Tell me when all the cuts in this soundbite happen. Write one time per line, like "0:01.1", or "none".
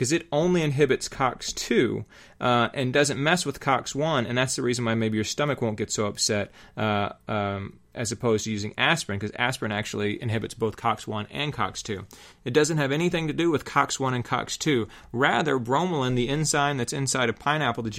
0:12.3